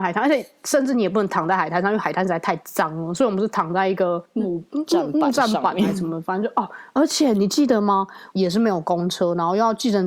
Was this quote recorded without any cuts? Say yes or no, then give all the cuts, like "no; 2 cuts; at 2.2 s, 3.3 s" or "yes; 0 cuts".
no; 1 cut; at 8.3 s